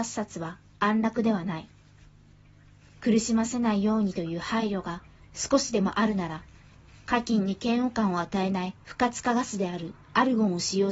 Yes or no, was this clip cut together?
yes